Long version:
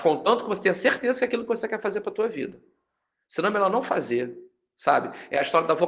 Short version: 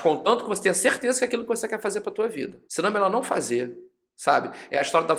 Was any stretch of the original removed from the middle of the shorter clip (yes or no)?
yes